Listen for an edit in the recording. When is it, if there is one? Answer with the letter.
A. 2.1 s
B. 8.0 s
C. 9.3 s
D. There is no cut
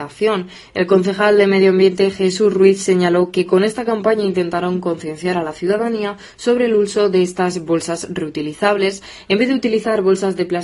D